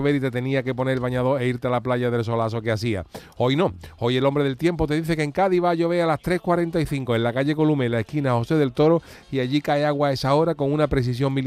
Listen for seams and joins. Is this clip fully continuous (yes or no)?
yes